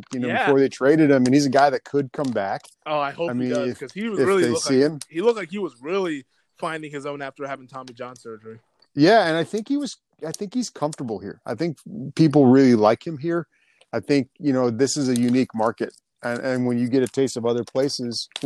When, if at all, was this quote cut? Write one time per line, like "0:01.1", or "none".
none